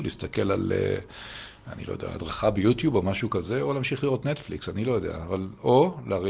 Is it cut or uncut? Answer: uncut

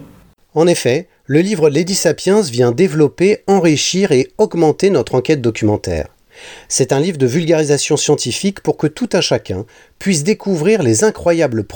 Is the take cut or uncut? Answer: uncut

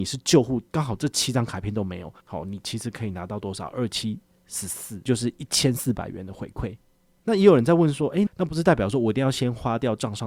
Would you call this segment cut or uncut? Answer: cut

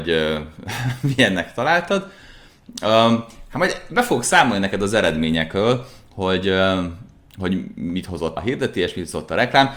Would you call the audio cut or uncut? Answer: cut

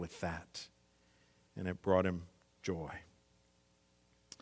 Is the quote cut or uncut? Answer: uncut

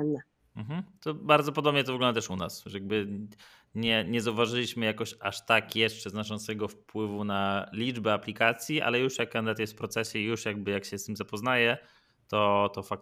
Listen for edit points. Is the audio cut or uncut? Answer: uncut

